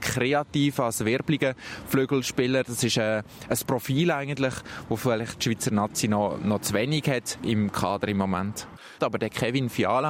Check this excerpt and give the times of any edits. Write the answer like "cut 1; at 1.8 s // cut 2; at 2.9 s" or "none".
cut 1; at 9.0 s